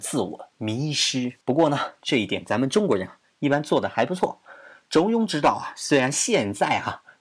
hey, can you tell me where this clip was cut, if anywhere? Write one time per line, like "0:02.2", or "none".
0:01.4